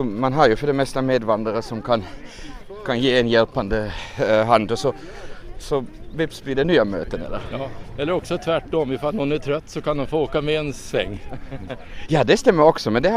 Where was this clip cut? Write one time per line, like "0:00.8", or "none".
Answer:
none